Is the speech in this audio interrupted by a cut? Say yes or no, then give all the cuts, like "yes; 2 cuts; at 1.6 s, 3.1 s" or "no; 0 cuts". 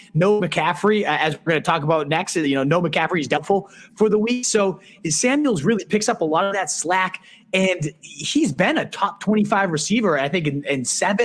no; 0 cuts